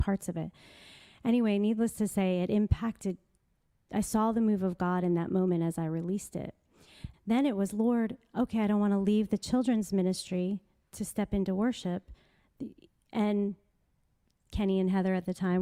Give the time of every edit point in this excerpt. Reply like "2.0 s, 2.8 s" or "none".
7.1 s